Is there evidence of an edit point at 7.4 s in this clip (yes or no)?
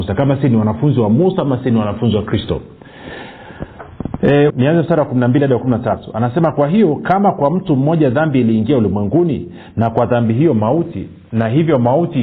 no